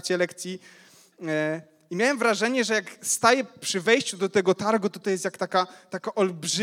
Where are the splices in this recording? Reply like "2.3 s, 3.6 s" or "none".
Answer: none